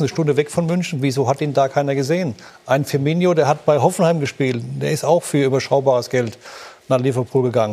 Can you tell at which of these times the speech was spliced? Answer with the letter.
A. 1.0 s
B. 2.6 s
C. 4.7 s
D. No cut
D